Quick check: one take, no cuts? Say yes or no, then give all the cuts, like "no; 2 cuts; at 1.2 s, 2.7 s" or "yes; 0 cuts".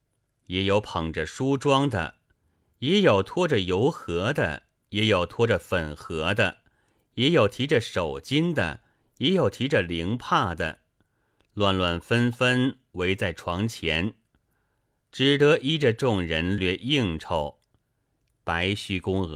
no; 2 cuts; at 16.6 s, 18.3 s